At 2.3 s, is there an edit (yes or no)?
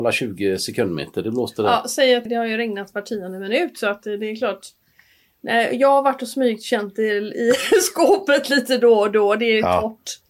yes